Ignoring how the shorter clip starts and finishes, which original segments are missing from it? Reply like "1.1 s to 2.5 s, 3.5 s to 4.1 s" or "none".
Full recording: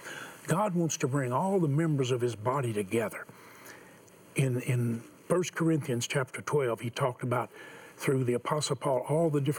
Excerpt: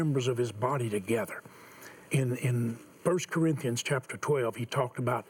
3.9 s to 4.3 s

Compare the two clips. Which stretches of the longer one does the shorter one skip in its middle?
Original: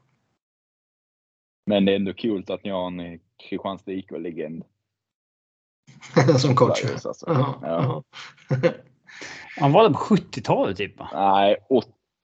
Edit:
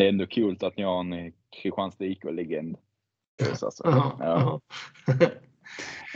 5.3 s to 6.8 s

